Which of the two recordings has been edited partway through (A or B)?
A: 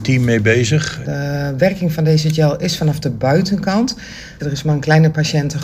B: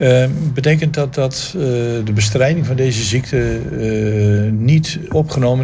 A